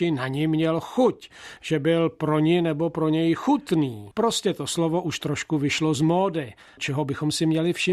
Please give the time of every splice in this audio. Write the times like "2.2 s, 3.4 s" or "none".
4.1 s, 6.8 s